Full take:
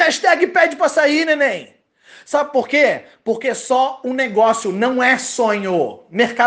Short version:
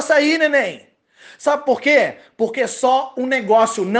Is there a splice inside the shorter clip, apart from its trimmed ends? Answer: no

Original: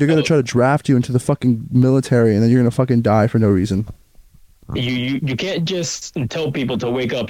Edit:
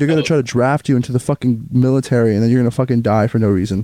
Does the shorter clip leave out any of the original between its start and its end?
no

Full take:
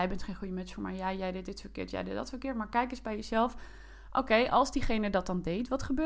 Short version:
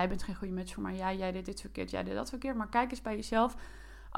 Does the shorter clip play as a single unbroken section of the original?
yes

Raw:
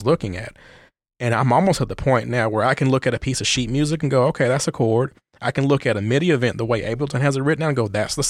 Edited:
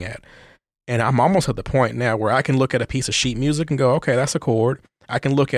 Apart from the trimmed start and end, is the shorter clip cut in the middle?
no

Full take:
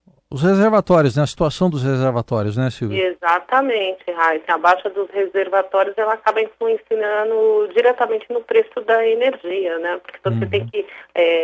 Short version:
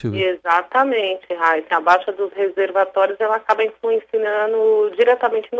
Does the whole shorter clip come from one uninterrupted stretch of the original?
yes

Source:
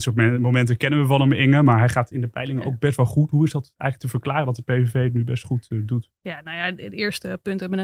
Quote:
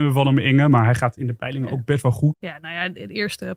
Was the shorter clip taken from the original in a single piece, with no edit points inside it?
no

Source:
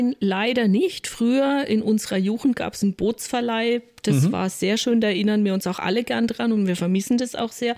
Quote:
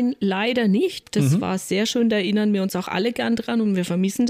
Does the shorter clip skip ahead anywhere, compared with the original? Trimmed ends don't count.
yes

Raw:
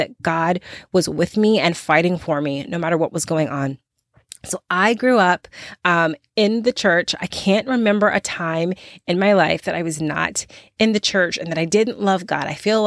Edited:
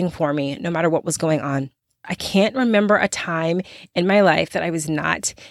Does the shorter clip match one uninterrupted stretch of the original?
no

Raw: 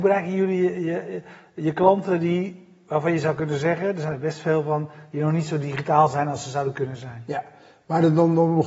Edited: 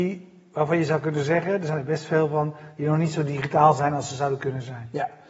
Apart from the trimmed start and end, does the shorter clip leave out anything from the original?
no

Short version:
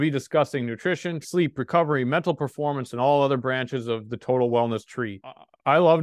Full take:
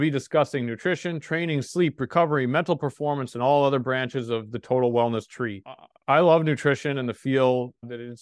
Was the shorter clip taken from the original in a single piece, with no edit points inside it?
no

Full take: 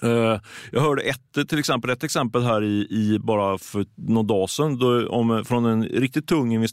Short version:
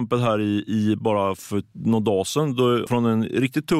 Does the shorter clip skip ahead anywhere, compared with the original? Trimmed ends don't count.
yes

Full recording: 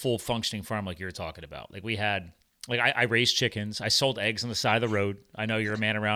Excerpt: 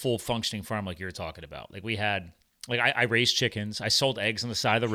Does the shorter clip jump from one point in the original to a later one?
no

